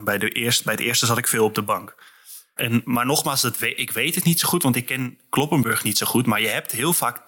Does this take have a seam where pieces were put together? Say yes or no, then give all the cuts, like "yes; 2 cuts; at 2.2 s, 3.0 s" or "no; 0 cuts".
yes; 1 cut; at 2.6 s